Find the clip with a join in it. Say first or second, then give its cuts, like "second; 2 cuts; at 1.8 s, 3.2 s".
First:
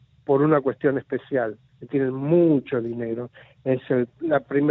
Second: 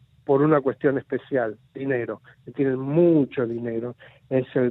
first; 1 cut; at 1.7 s